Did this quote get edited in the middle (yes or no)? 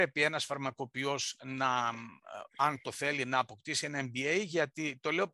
no